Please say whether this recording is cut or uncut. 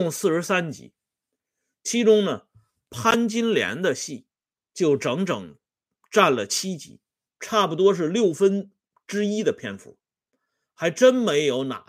uncut